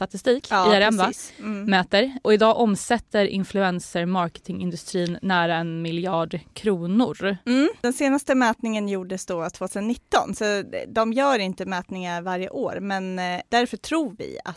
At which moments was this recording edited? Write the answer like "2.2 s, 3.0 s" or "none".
none